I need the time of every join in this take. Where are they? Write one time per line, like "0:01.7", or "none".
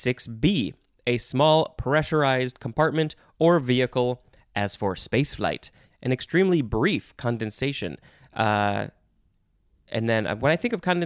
0:05.9